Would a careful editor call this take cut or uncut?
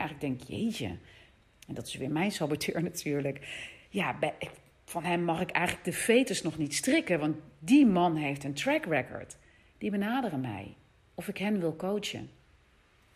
uncut